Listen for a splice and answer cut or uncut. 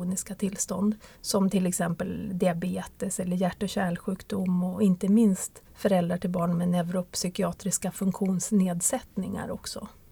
cut